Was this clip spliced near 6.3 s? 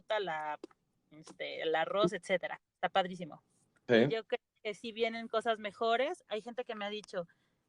yes; 2 cuts; at 3.9 s, 6.3 s

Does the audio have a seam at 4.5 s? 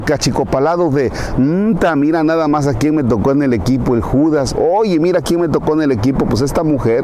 no; 0 cuts

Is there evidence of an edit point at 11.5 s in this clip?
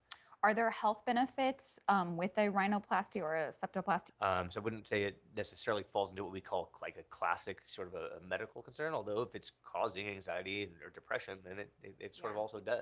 no; 1 cut; at 4.1 s

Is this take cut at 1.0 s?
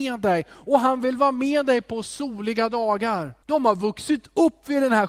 no; 1 cut; at 3.4 s

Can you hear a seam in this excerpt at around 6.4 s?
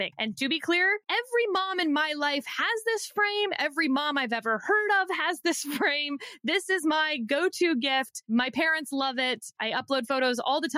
no; 0 cuts

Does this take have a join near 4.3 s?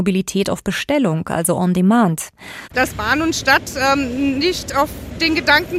no; 1 cut; at 2.7 s

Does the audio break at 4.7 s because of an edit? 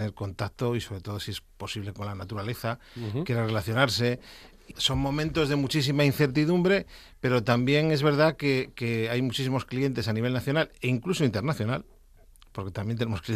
yes; 1 cut; at 4.7 s

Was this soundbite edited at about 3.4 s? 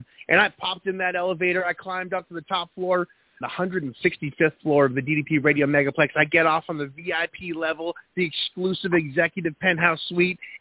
yes; 1 cut; at 3.4 s

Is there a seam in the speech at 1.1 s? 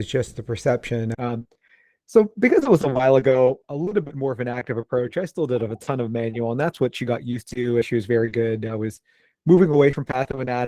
yes; 3 cuts; at 1.1 s, 3.6 s, 7.8 s

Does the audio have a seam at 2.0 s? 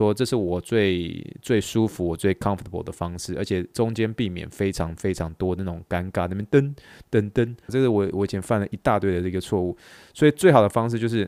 no; 1 cut; at 7.7 s

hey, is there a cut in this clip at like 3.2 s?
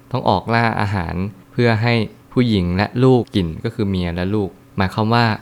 yes; 1 cut; at 3.2 s

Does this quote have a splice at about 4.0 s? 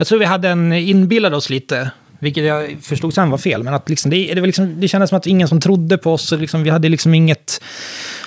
no; 0 cuts

